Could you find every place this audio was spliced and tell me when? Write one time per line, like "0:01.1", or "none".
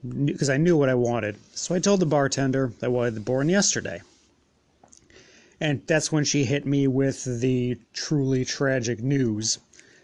none